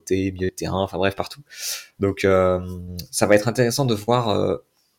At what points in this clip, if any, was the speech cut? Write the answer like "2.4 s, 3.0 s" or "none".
none